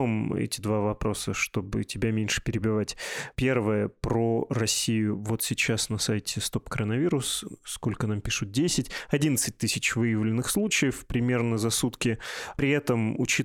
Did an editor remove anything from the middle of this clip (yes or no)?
no